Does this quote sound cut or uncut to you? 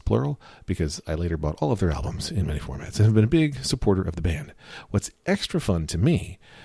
uncut